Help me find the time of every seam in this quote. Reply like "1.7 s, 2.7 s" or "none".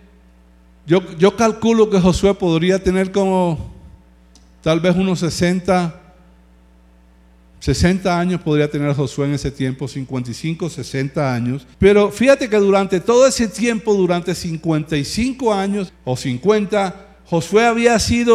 11.7 s, 15.9 s